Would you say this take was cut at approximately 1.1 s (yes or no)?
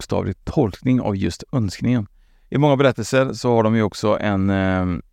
no